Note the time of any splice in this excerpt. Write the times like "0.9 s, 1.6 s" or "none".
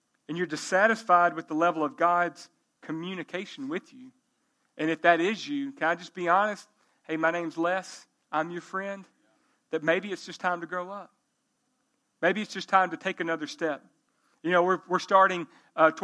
none